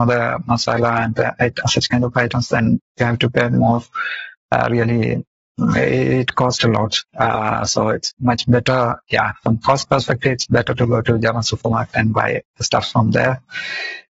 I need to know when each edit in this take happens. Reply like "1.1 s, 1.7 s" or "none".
none